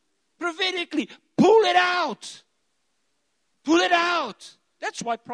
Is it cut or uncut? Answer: uncut